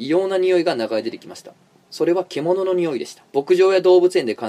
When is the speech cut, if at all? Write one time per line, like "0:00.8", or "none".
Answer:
0:03.3

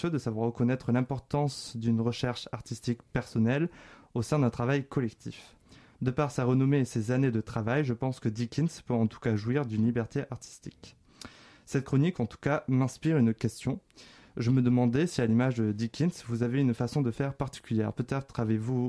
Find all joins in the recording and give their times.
none

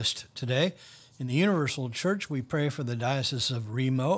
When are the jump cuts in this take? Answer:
none

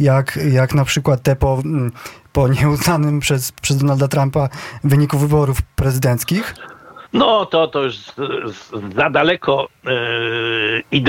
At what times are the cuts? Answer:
0:07.1

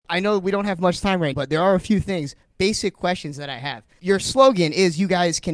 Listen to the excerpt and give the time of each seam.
0:01.3

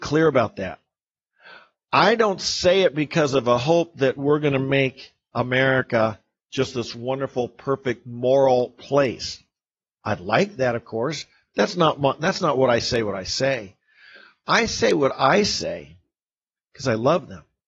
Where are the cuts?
none

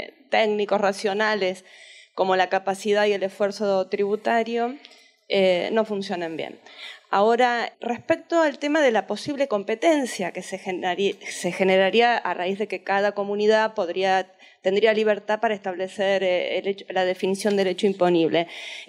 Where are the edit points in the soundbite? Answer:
0:07.7

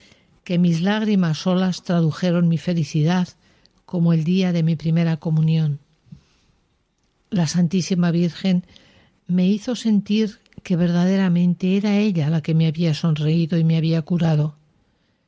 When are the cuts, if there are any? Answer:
none

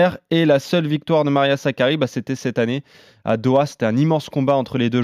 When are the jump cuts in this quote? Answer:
none

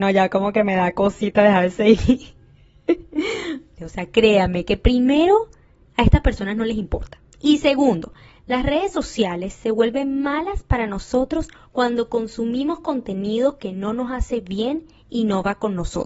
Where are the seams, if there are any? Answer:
0:03.8

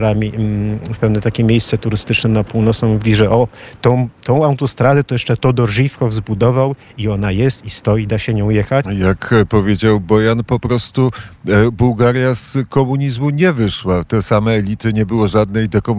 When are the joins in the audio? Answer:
0:08.8

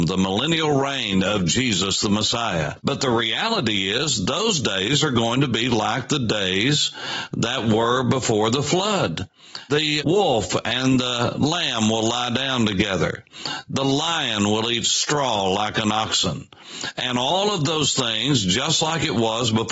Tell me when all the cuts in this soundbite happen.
0:02.8

